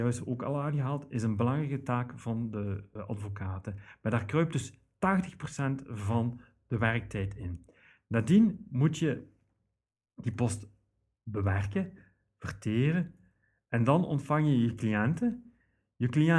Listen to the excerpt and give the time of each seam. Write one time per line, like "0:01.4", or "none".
0:03.0